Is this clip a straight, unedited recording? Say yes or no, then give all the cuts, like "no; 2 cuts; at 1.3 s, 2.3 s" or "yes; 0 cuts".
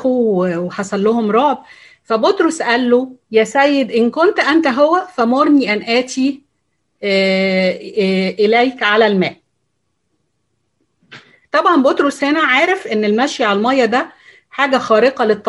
no; 1 cut; at 3.2 s